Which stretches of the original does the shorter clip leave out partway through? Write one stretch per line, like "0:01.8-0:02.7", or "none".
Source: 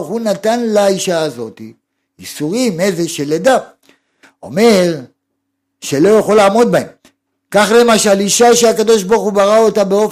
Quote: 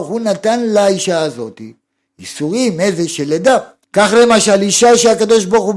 0:03.8-0:07.4